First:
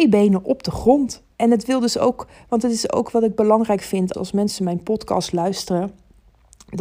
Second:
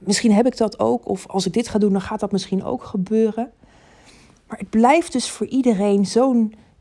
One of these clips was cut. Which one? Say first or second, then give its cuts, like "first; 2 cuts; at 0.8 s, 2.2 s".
first; 2 cuts; at 1.3 s, 4.1 s